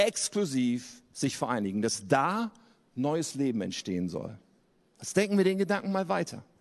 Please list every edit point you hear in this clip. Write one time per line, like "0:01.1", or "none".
none